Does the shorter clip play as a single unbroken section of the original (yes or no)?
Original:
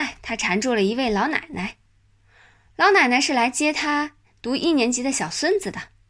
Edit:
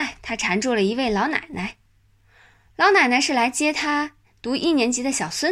yes